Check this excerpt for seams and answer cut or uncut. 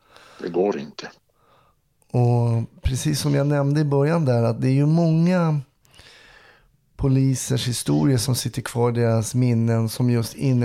uncut